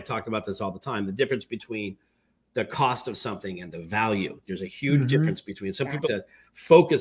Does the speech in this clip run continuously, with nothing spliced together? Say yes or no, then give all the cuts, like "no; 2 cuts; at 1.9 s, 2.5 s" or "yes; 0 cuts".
no; 1 cut; at 6.0 s